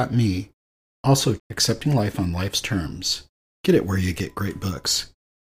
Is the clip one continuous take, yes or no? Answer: no